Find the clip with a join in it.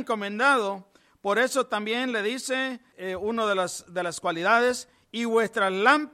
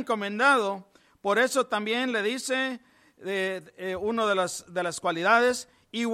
first; 1 cut; at 2.9 s

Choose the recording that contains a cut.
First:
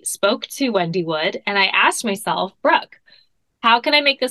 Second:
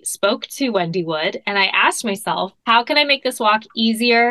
second; 1 cut; at 2.6 s

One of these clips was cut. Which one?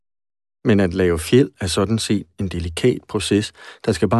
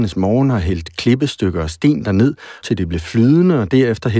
second; 1 cut; at 2.6 s

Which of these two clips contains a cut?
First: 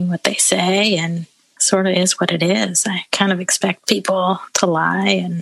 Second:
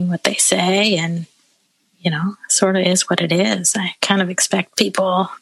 first; 1 cut; at 1.6 s

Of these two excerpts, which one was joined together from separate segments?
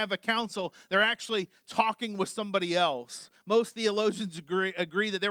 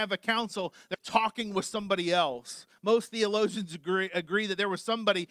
second; 1 cut; at 0.9 s

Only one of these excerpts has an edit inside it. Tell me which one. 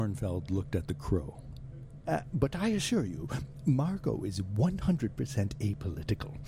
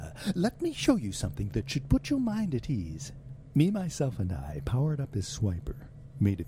first; 1 cut; at 2.0 s

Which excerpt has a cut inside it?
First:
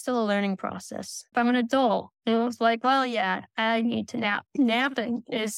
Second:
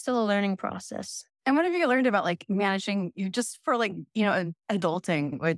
first; 2 cuts; at 1.3 s, 4.5 s

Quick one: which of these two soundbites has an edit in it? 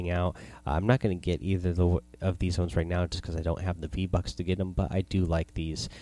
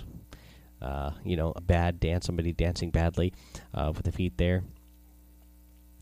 second; 1 cut; at 1.6 s

